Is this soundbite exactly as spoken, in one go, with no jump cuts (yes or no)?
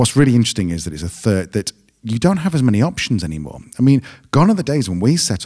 yes